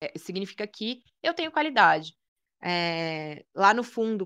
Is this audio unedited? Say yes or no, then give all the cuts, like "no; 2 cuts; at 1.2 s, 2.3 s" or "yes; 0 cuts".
no; 1 cut; at 2.5 s